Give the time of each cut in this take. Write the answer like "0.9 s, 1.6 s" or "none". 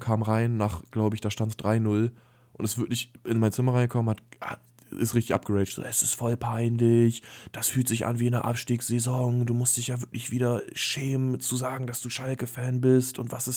none